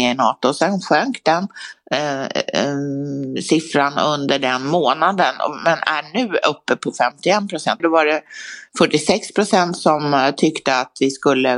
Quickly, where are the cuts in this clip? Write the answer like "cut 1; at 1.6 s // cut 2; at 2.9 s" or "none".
cut 1; at 7.8 s // cut 2; at 9.8 s